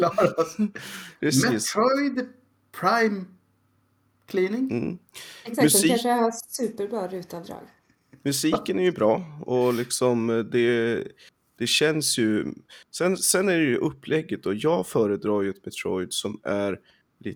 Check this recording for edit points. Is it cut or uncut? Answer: uncut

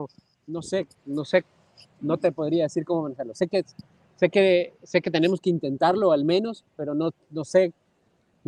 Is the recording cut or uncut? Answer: uncut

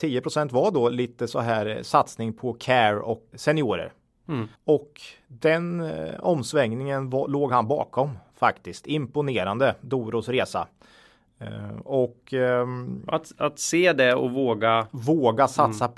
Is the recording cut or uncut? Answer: cut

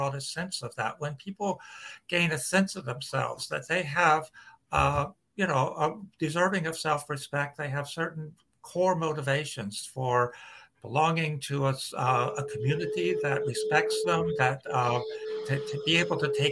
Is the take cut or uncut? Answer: uncut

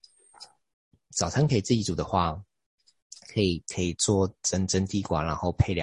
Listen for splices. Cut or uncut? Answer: uncut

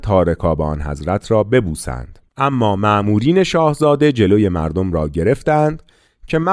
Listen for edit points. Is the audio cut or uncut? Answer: cut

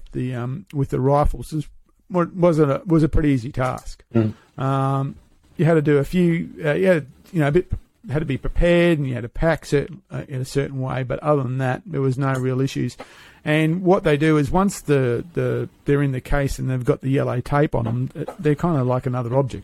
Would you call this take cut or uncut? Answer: uncut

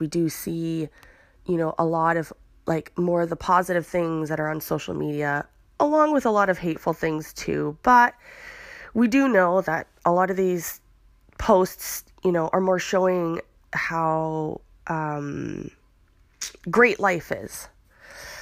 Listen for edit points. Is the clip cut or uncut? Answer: uncut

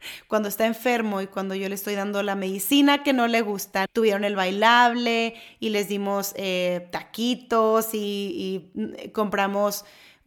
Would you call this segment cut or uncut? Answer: cut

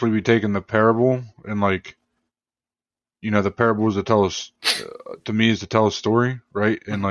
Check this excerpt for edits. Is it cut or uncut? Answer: uncut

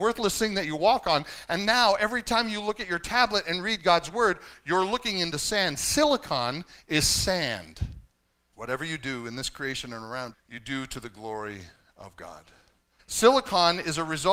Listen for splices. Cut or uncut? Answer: cut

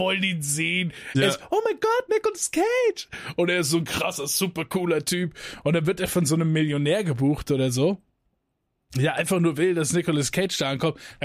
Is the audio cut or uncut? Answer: uncut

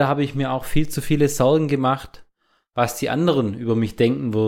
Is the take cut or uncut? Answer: uncut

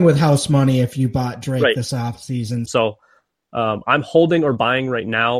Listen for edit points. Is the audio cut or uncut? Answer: cut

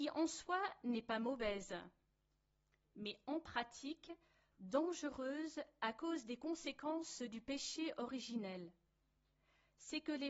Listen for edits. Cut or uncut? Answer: uncut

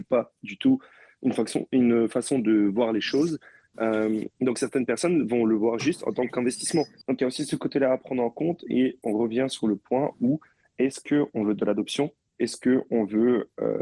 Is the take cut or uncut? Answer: cut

